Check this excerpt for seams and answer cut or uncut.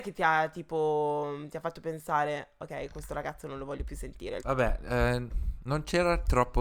cut